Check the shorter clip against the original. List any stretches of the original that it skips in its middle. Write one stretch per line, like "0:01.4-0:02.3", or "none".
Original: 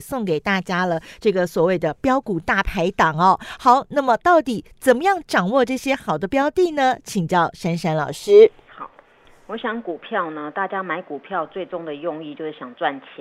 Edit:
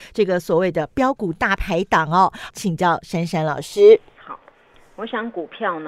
0:03.6-0:07.0